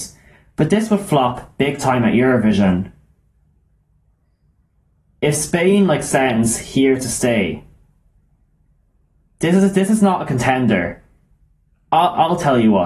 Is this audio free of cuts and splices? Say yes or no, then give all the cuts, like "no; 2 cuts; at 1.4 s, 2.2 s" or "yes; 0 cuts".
yes; 0 cuts